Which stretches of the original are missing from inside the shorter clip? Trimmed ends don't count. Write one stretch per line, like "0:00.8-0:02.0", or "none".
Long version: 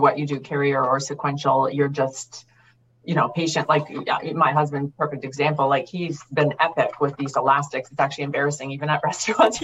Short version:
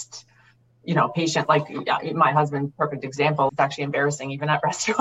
0:05.7-0:07.9